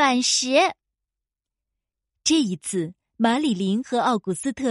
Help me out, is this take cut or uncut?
uncut